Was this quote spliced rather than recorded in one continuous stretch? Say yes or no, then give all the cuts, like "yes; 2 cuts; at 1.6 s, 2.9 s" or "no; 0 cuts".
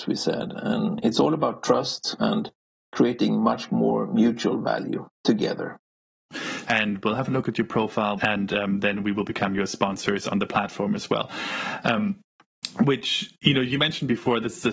yes; 3 cuts; at 2.2 s, 6.7 s, 8.2 s